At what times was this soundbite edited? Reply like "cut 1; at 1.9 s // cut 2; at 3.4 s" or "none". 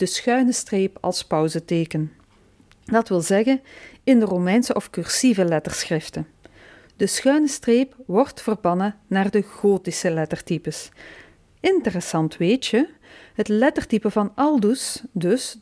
cut 1; at 11.5 s